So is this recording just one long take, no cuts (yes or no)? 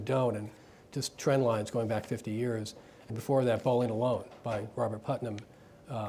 no